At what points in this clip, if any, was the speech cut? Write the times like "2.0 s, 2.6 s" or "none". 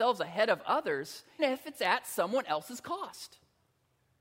1.4 s